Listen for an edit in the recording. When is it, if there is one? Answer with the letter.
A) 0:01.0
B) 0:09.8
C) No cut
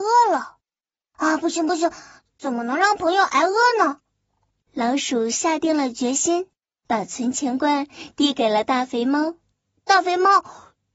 C